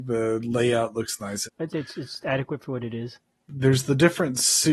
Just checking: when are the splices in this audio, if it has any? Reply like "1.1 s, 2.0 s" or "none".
1.4 s, 3.5 s